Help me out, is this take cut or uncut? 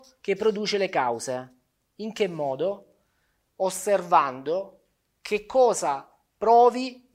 uncut